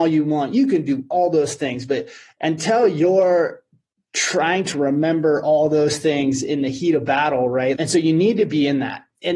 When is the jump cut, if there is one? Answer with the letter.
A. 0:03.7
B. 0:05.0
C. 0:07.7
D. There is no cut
C